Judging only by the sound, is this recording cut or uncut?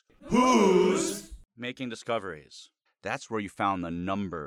cut